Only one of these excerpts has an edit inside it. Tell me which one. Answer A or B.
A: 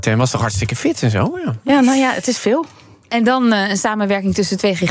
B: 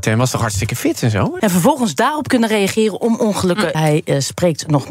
B